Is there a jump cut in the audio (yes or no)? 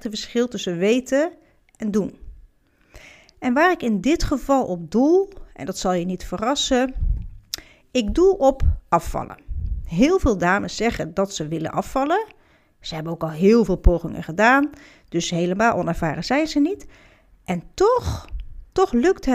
no